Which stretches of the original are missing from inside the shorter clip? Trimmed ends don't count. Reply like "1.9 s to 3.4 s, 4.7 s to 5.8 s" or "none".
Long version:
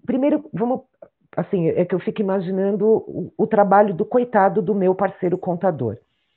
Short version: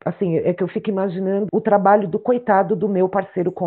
2.8 s to 3.3 s